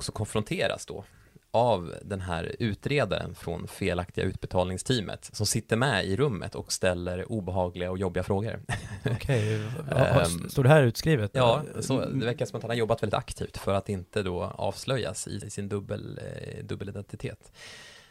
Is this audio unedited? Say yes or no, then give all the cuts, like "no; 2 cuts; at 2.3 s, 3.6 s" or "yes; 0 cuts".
no; 2 cuts; at 11.3 s, 15.4 s